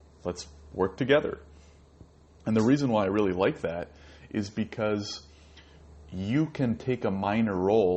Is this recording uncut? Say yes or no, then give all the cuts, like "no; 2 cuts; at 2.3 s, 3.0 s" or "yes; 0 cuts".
yes; 0 cuts